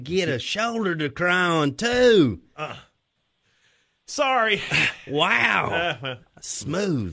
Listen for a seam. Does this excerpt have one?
yes; 1 cut; at 2.5 s

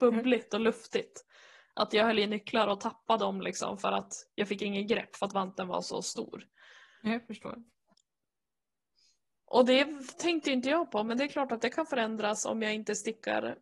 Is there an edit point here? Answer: no; 0 cuts

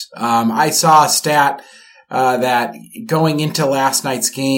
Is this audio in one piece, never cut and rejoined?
yes; 0 cuts

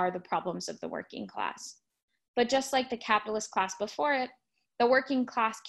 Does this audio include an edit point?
no; 0 cuts

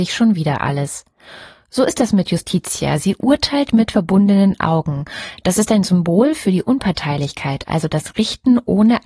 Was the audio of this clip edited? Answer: no; 0 cuts

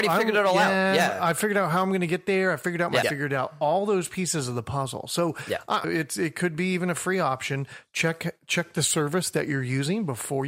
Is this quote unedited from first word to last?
no; 2 cuts; at 3.0 s, 5.8 s

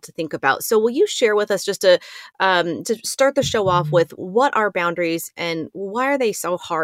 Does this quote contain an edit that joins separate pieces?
yes; 2 cuts; at 2.8 s, 4.2 s

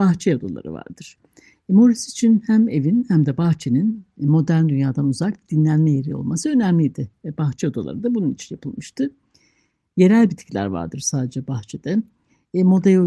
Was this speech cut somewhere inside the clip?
no; 0 cuts

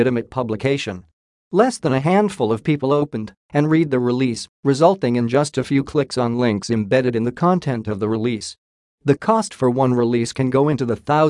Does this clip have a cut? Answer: no; 0 cuts

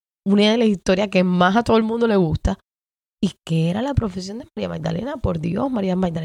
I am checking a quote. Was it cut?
no; 0 cuts

